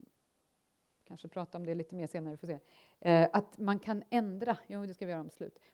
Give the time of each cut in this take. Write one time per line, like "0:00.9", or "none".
none